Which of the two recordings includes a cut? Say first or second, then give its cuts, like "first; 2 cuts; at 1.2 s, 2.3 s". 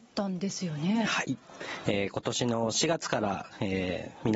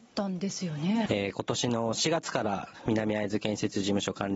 second; 2 cuts; at 1.1 s, 2.8 s